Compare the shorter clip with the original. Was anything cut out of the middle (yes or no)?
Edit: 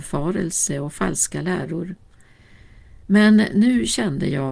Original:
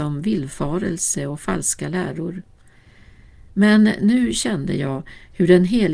no